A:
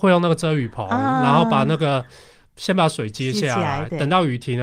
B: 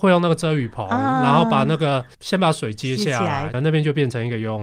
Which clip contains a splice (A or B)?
B